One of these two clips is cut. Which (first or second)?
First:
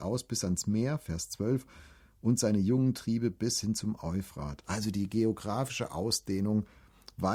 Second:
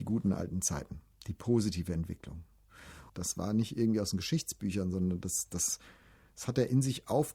second